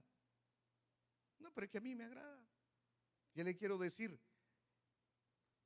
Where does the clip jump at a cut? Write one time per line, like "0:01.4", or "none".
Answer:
0:01.3
0:03.2

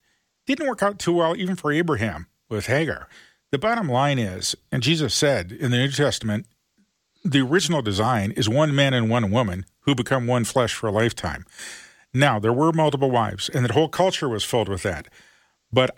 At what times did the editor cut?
none

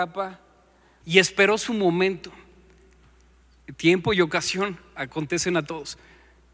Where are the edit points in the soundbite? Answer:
0:01.0

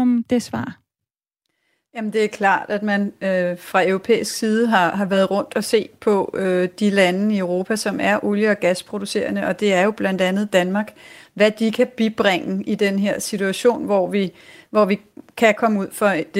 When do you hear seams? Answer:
none

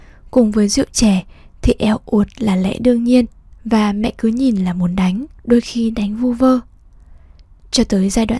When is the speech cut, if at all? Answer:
0:03.5
0:05.4

